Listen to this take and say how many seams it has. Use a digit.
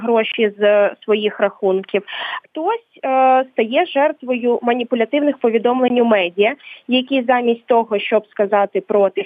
0